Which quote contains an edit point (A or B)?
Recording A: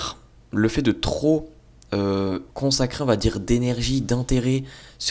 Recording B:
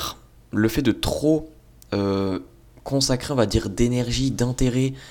A